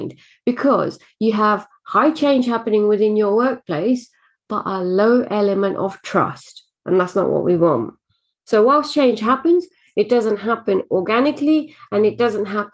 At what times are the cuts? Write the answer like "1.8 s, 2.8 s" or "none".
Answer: none